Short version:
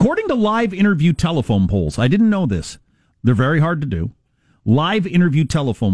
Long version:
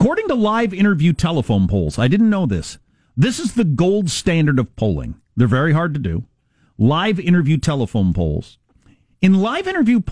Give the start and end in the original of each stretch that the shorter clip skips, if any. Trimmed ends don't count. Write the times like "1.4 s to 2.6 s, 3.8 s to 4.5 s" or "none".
3.1 s to 5.2 s